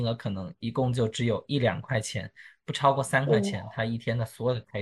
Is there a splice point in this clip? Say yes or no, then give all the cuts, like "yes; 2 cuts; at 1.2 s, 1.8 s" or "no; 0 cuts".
no; 0 cuts